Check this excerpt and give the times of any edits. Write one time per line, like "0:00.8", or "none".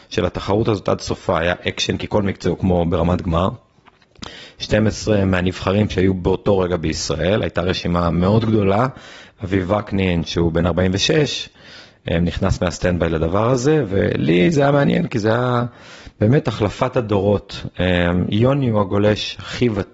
0:09.3

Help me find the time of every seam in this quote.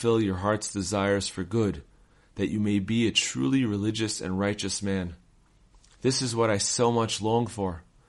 none

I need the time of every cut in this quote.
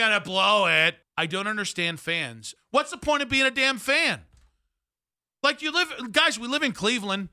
0:01.0
0:02.6

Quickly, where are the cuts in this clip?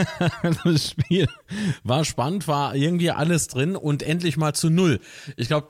none

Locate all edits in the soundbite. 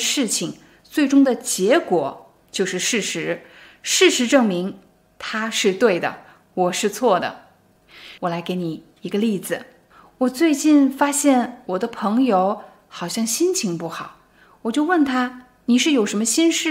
0:08.2

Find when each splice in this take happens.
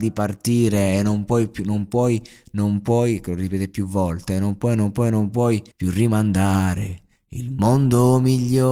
0:05.7

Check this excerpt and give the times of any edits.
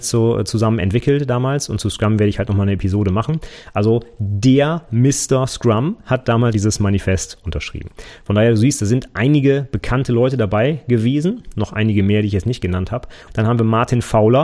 0:06.5
0:13.3

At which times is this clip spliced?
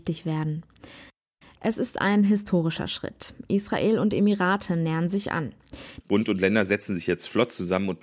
0:06.0

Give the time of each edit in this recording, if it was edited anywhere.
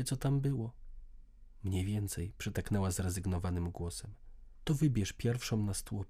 0:04.6

